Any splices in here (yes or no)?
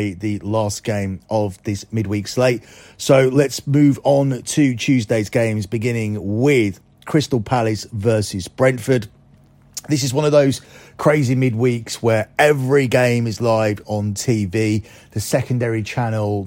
no